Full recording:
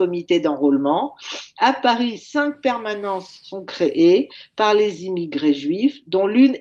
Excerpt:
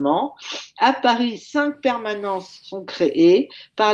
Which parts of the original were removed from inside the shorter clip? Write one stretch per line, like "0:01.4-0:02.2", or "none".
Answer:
none